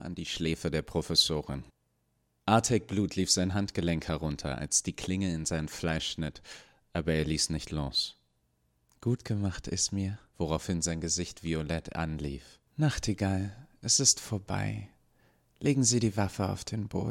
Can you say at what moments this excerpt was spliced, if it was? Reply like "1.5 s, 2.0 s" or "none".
10.3 s, 12.7 s

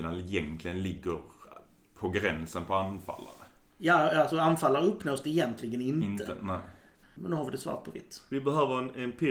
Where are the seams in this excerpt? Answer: 7.0 s

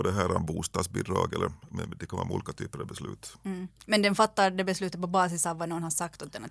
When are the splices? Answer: none

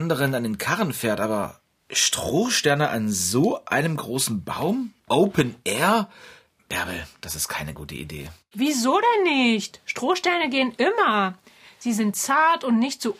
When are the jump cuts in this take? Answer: 5.0 s

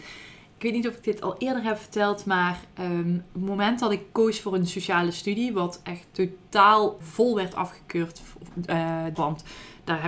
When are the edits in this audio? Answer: 7.0 s, 9.2 s

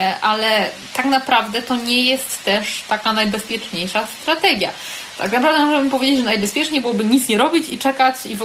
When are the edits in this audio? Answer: none

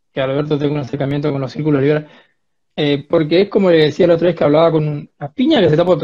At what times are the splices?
2.7 s, 5.1 s

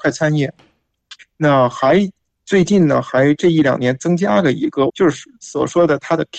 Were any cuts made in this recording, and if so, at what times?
1.2 s, 4.9 s

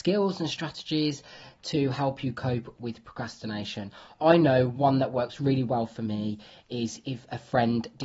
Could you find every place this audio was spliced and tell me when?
none

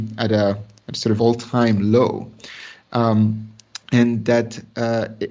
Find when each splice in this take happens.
1.2 s

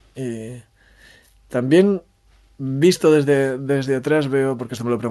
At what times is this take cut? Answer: none

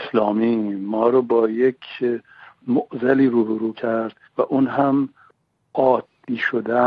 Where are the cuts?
4.3 s

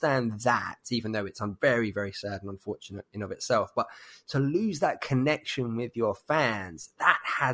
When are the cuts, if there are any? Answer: none

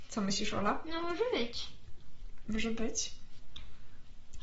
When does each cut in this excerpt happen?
none

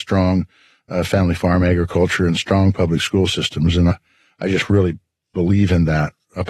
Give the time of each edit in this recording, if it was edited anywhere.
none

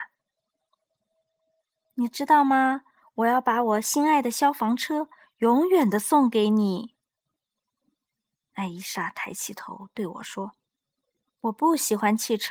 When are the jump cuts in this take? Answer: none

